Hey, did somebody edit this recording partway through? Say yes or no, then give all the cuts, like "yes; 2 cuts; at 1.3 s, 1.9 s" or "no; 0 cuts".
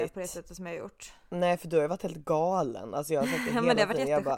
no; 0 cuts